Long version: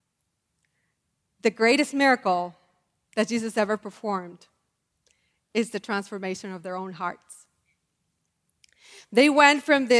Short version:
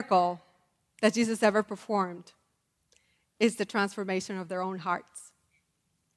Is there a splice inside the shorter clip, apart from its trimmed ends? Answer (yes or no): no